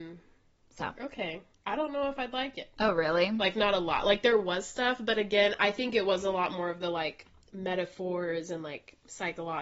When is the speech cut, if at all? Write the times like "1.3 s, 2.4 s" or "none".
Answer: 2.8 s